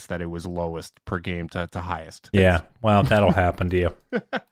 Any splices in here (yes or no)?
yes